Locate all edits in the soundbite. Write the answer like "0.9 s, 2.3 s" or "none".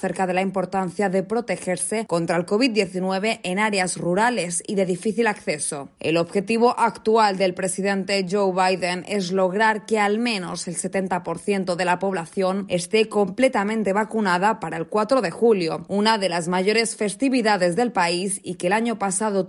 15.9 s